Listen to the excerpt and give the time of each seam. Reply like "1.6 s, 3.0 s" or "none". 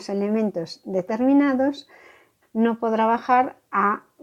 2.4 s